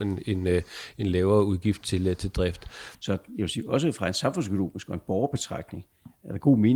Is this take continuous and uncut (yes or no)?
no